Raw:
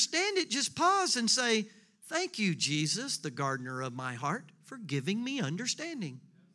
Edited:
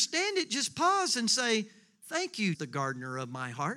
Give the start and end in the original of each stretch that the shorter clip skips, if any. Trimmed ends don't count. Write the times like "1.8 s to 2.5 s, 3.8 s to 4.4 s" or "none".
2.5 s to 3.2 s